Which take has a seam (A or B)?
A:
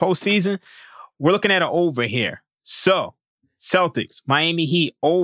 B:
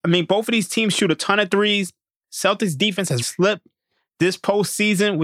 B